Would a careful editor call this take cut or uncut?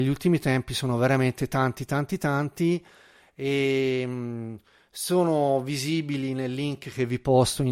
uncut